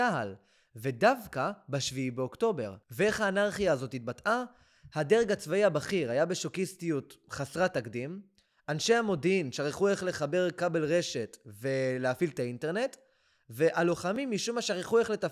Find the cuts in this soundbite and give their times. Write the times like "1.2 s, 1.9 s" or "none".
none